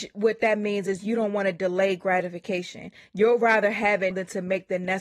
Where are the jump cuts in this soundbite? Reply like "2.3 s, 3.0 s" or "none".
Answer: 4.1 s